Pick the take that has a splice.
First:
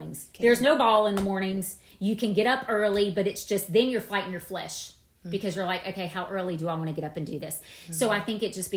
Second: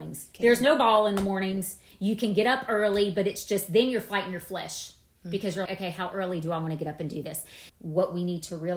second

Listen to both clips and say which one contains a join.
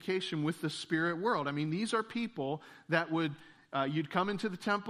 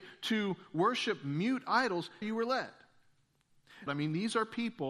second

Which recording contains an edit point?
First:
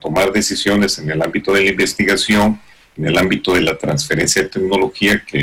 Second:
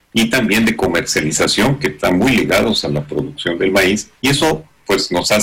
second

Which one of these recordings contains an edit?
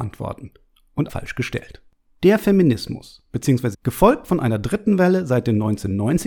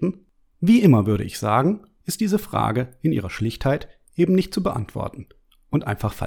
first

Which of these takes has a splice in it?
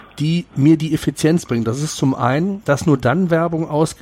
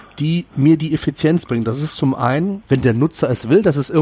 second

